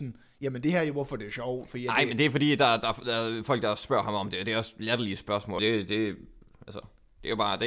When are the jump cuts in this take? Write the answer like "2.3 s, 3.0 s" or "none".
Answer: 5.6 s